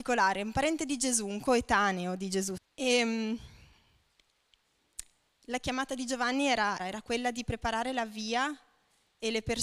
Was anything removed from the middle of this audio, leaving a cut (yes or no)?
yes